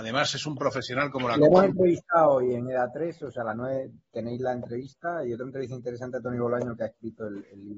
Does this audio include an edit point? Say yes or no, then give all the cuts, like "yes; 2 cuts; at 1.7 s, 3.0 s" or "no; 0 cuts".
no; 0 cuts